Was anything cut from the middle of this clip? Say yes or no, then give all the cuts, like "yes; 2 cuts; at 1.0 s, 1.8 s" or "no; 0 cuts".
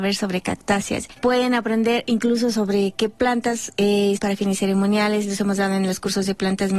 yes; 2 cuts; at 1.2 s, 4.2 s